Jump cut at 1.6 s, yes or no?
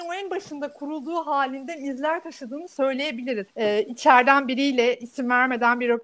no